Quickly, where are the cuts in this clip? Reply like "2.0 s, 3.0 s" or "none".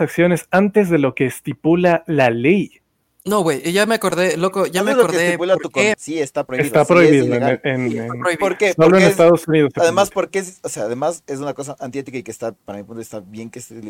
5.9 s